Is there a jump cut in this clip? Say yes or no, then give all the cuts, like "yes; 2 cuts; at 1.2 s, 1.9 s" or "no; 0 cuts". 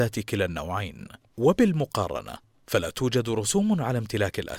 yes; 1 cut; at 1.3 s